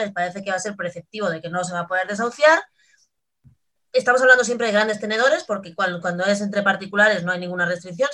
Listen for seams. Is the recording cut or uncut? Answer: uncut